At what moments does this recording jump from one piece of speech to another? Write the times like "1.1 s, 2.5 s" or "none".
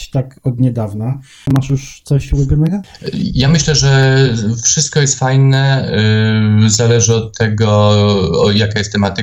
none